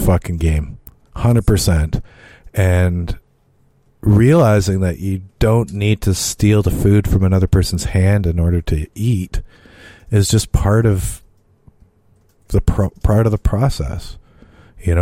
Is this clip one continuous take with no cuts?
yes; 0 cuts

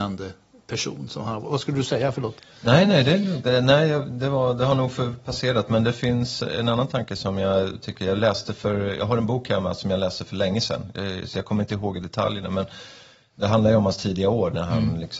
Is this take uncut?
yes; 0 cuts

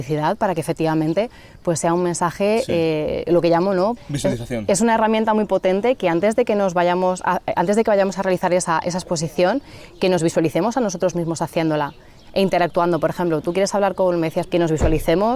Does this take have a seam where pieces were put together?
yes; 2 cuts; at 4.0 s, 14.4 s

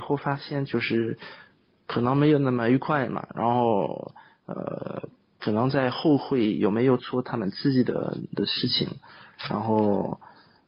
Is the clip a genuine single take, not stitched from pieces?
yes; 0 cuts

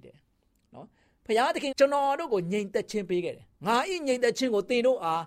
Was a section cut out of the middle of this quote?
yes; 2 cuts; at 1.7 s, 3.6 s

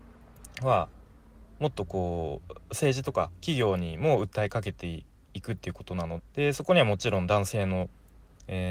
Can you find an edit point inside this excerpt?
yes; 1 cut; at 6.2 s

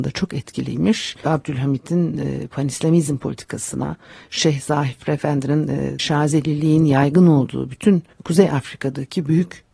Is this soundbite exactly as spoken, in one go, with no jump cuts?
no; 3 cuts; at 1.2 s, 6.0 s, 8.1 s

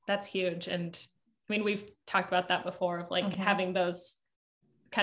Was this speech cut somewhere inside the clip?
no; 0 cuts

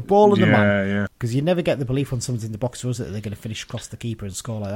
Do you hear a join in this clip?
yes; 1 cut; at 1.1 s

